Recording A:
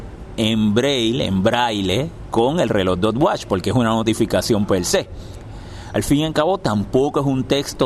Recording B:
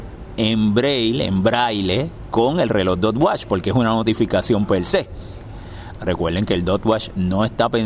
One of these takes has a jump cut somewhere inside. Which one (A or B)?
B